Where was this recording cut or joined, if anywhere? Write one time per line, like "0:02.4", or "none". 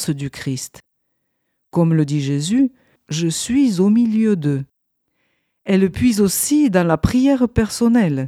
0:03.0